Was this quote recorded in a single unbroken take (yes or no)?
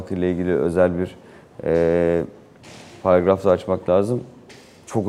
yes